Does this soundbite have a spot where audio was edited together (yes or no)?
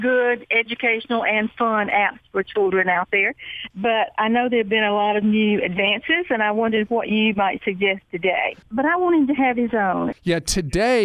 yes